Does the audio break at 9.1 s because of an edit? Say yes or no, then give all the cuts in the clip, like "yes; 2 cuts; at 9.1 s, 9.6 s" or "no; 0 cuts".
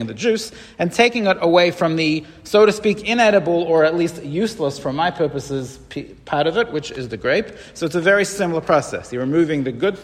no; 0 cuts